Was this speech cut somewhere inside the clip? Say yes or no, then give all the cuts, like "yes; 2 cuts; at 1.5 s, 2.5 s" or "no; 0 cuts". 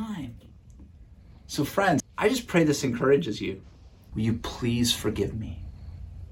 yes; 2 cuts; at 2.0 s, 4.1 s